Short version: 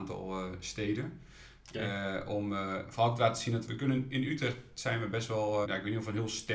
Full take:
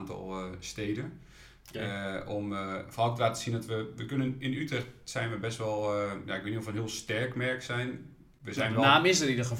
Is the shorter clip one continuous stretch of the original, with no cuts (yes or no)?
no